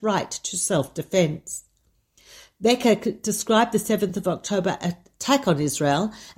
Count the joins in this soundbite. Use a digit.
0